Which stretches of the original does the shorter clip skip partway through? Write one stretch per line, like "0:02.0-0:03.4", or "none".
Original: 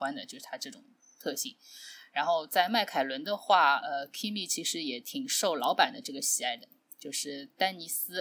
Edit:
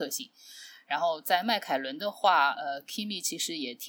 none